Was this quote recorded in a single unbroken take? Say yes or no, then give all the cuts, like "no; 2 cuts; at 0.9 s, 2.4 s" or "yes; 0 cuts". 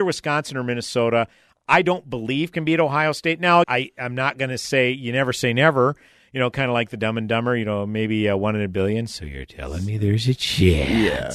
no; 1 cut; at 3.6 s